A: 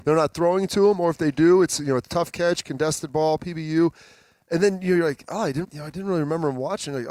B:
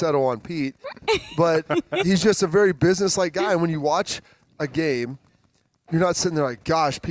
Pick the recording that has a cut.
A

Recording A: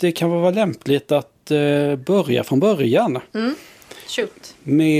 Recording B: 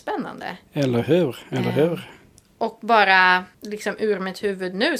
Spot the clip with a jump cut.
B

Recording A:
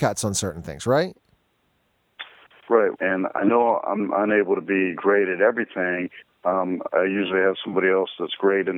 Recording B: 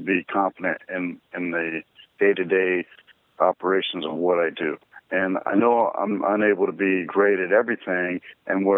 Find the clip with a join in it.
A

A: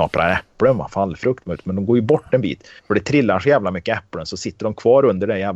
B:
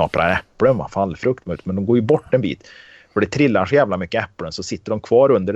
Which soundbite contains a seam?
A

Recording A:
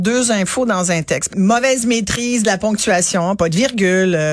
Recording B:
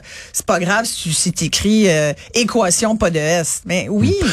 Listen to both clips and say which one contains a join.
A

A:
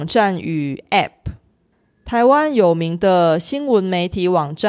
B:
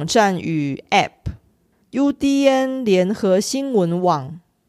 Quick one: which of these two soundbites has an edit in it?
B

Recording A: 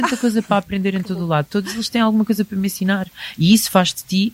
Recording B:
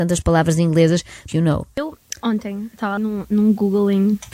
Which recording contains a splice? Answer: B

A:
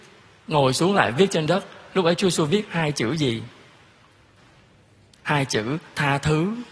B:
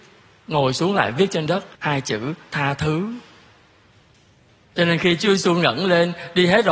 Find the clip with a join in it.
B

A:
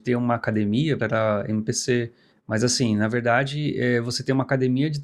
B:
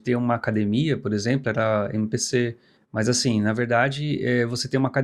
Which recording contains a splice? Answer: A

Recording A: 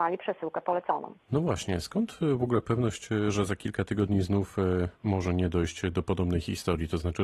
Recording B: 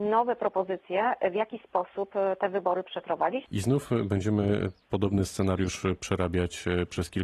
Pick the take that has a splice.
B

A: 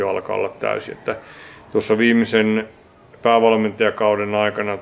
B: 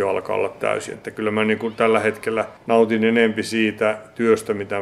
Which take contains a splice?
B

